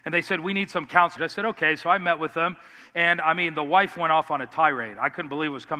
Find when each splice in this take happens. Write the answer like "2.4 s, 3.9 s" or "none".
1.2 s

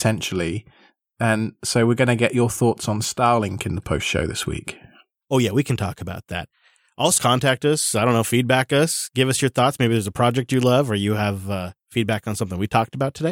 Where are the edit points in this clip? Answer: 7.2 s

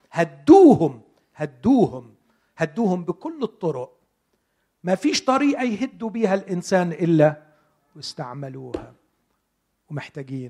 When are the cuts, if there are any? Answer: none

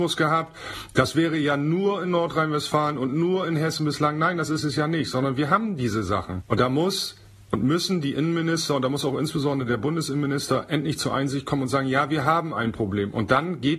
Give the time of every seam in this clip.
none

